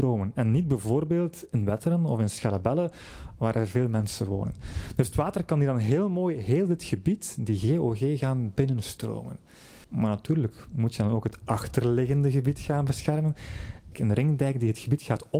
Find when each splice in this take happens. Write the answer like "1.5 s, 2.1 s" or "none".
9.8 s, 13.9 s